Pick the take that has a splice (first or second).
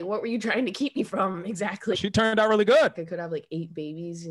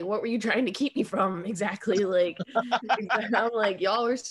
first